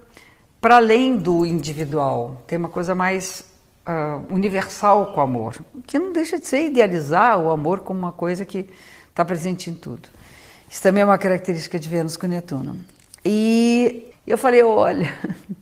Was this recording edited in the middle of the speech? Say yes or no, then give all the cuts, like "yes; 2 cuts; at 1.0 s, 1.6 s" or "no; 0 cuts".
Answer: yes; 1 cut; at 14.1 s